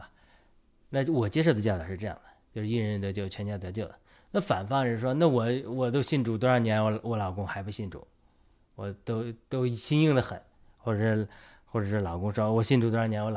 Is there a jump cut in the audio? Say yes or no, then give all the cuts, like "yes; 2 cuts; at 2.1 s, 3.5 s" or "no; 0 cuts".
no; 0 cuts